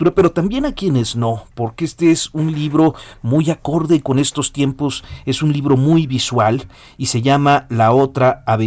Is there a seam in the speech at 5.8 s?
no; 0 cuts

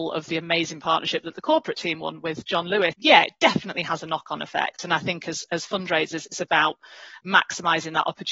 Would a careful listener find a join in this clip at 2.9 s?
yes; 1 cut; at 2.9 s

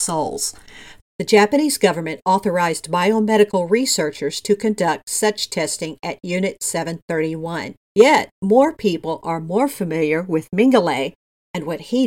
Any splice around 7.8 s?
yes; 2 cuts; at 1.0 s, 7.8 s

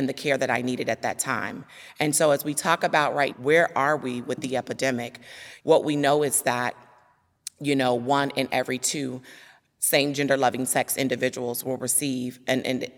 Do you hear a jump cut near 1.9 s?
no; 2 cuts; at 3.3 s, 5.6 s

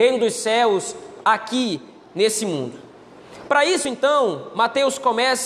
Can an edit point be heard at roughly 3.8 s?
no; 0 cuts

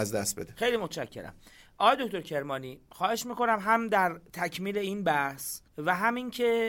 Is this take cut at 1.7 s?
no; 1 cut; at 5.7 s

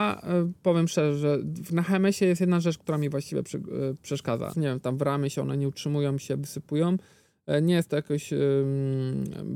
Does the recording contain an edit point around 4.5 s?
yes; 1 cut; at 4.5 s

